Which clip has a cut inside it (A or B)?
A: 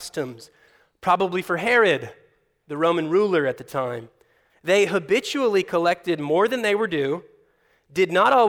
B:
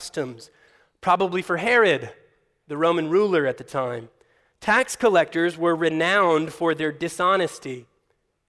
A